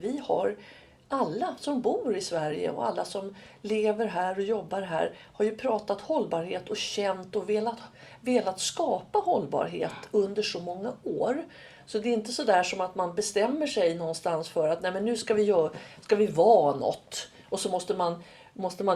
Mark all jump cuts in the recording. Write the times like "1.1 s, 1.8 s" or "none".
none

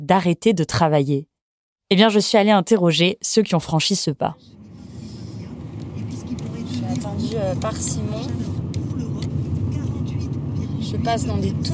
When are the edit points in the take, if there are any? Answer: none

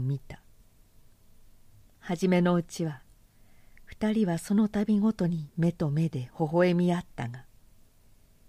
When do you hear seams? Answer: none

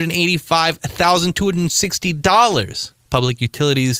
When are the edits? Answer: 3.0 s

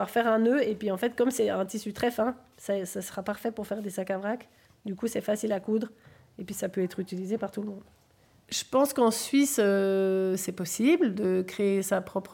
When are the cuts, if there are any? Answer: none

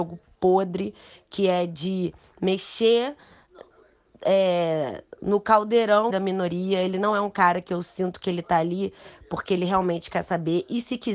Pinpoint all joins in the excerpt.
6.1 s

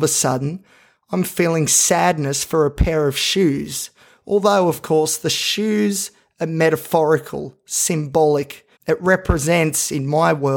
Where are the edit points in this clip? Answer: 8.8 s

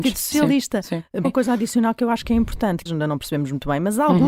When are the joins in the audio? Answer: 1.2 s, 2.9 s

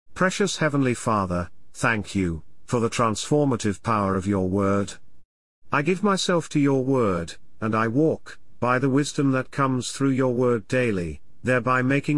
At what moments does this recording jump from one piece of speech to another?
none

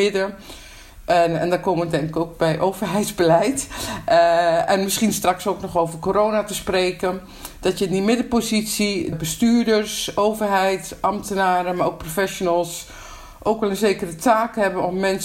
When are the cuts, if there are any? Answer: 9.1 s

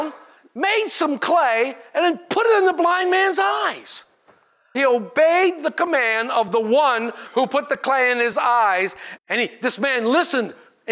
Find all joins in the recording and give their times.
4.7 s, 9.2 s

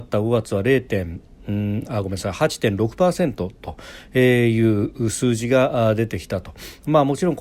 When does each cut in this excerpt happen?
none

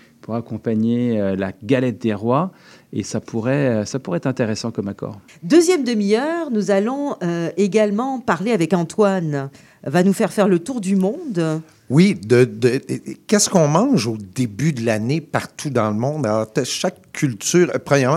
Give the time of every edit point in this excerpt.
5.3 s

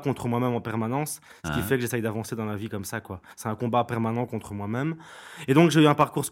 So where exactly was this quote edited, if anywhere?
none

